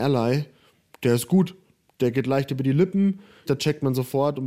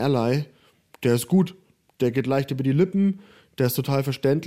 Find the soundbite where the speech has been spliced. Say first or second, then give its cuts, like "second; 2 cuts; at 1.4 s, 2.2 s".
first; 1 cut; at 3.5 s